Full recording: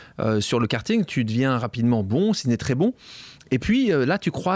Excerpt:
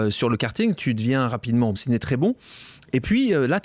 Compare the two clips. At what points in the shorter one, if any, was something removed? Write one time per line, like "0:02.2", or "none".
0:01.8